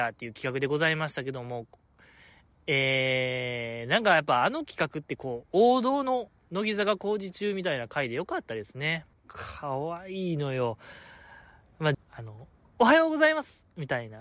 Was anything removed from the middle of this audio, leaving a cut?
yes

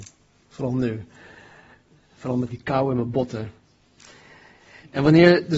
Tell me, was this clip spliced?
yes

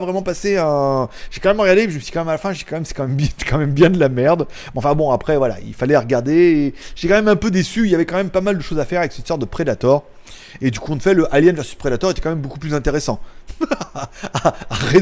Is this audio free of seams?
yes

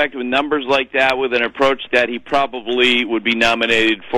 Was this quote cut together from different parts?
yes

